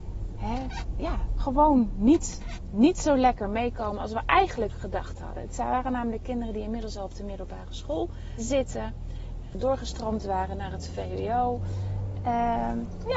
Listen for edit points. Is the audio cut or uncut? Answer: cut